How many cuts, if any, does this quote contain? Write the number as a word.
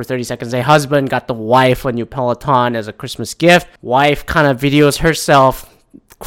one